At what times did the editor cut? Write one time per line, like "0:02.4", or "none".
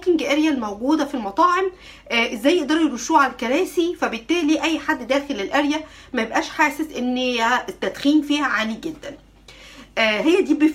none